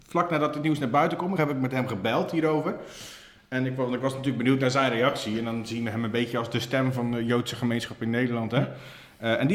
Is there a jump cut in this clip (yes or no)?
yes